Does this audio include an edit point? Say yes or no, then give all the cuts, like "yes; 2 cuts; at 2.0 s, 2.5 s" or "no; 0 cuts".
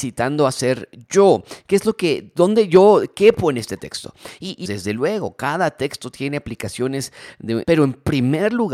yes; 2 cuts; at 4.6 s, 7.6 s